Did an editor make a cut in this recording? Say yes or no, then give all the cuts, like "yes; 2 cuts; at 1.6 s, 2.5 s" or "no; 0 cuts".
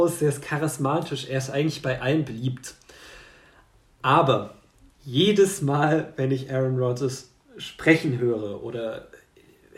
no; 0 cuts